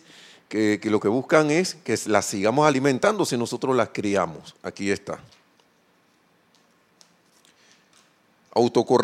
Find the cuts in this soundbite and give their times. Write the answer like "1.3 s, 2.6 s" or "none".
4.6 s